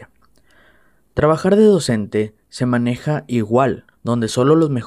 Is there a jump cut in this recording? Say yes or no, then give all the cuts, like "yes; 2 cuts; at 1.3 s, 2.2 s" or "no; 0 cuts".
yes; 1 cut; at 3.9 s